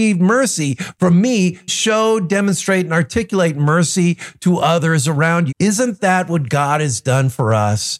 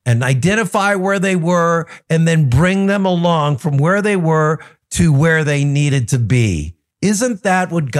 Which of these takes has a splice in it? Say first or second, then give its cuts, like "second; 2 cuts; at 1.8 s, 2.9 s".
first; 2 cuts; at 1.7 s, 5.5 s